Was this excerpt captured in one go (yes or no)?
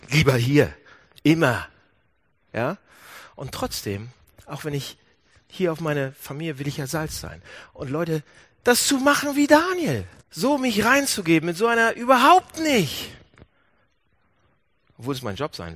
no